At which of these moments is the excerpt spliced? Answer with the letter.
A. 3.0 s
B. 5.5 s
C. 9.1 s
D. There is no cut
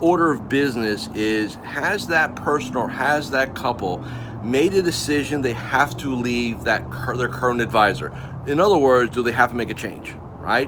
D